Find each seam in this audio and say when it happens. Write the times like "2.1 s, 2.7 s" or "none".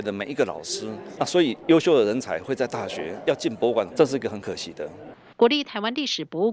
1.2 s, 3.9 s, 5.3 s